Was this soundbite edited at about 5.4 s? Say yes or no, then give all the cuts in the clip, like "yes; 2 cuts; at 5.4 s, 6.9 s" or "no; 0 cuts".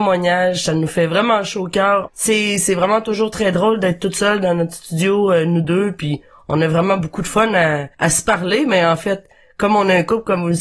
no; 2 cuts; at 2.1 s, 7.9 s